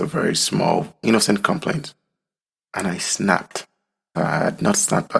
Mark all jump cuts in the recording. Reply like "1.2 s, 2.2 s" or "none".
4.1 s